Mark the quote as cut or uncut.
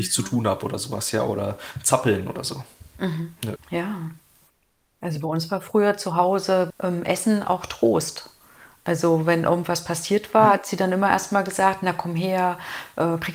cut